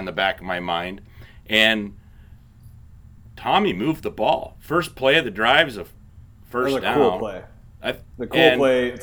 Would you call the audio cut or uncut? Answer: uncut